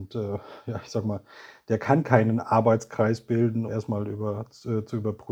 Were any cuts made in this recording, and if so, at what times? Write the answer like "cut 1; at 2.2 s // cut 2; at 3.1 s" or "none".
cut 1; at 3.7 s